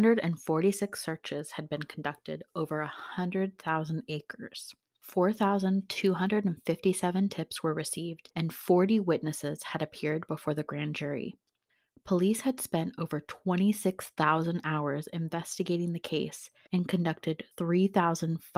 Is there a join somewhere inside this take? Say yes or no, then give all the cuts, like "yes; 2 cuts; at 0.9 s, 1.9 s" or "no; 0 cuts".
no; 0 cuts